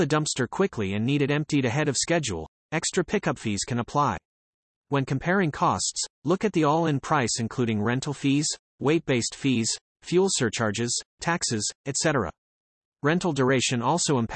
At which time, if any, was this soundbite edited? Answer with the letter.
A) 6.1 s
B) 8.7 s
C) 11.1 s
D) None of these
D